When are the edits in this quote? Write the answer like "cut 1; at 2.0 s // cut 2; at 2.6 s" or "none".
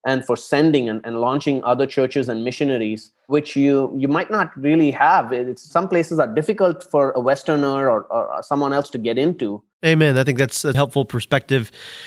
cut 1; at 9.7 s // cut 2; at 10.7 s